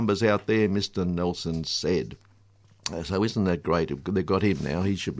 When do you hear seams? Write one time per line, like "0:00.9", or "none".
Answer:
none